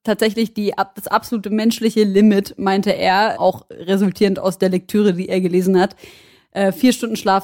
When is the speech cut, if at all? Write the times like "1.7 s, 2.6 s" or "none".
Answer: 3.4 s